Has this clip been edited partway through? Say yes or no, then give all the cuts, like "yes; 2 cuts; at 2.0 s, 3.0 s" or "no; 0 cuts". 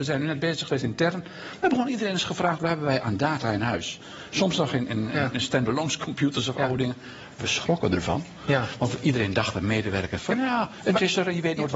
no; 0 cuts